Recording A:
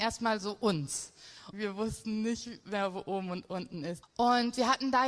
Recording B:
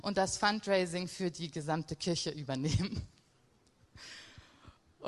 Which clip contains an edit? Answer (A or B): A